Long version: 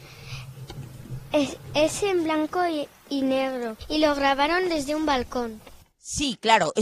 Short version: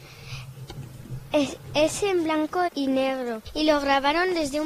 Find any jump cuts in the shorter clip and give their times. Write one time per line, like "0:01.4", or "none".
0:02.7